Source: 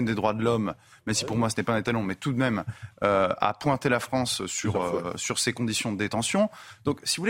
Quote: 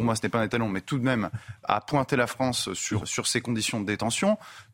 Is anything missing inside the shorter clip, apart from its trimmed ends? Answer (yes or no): yes